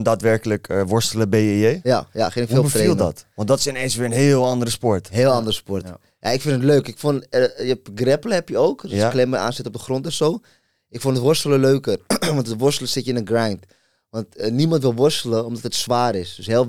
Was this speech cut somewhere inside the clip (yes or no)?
no